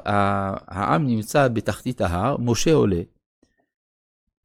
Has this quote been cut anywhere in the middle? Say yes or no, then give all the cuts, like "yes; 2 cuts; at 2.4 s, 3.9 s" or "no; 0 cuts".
no; 0 cuts